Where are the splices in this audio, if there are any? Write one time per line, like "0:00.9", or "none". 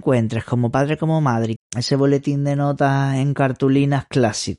0:01.6